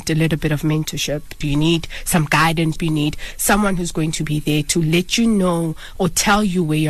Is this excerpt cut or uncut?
cut